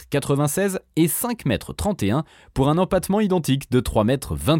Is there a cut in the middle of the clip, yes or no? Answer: no